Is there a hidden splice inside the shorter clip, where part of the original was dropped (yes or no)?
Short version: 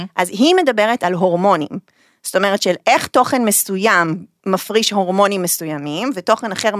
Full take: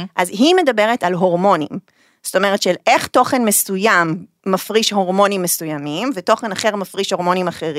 no